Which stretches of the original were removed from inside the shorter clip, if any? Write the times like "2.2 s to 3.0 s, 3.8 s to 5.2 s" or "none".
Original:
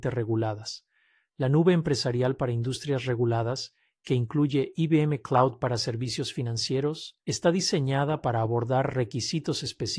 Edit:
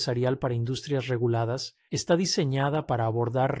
3.9 s to 7.2 s